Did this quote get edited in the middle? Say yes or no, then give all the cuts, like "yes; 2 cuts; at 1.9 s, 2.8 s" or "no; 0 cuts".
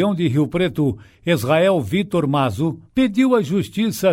yes; 1 cut; at 2.9 s